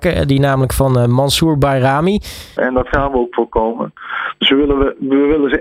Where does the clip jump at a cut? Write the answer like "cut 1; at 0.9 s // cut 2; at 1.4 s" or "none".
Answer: cut 1; at 2.6 s